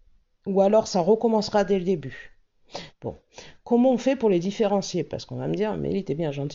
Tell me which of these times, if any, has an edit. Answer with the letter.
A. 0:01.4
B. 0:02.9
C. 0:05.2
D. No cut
B